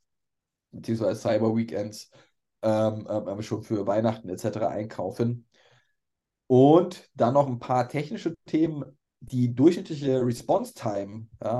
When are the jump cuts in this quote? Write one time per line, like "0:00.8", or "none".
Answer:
none